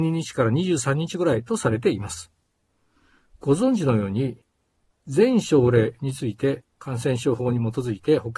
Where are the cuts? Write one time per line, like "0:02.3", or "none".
0:04.9
0:06.7